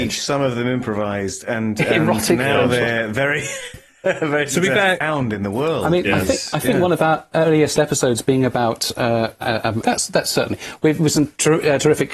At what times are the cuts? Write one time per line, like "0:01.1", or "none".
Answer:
0:05.0
0:09.8